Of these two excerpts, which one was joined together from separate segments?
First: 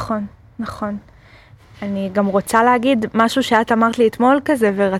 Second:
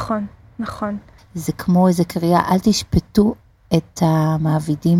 second; 1 cut; at 1.2 s

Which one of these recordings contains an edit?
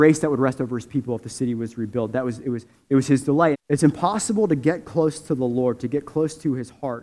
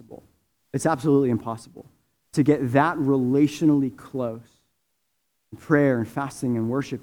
first; 1 cut; at 3.5 s

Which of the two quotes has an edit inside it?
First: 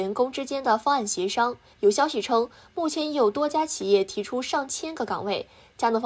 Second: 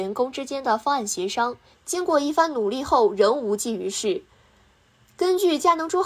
second; 1 cut; at 1.7 s

